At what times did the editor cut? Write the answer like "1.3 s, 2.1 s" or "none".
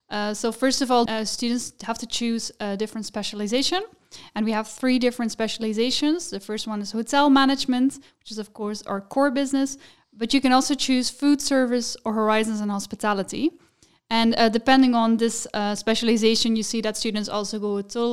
1.1 s